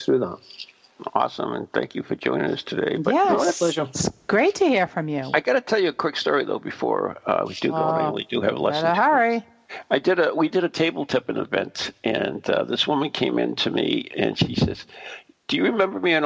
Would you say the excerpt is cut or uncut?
uncut